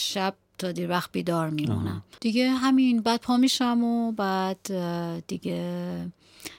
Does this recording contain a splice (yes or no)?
yes